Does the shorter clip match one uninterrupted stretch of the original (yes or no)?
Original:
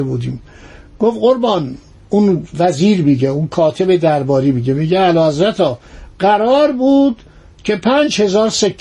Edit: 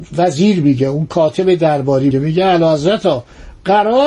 no